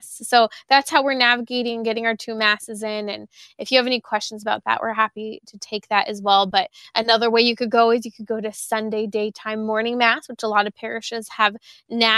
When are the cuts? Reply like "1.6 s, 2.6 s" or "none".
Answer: none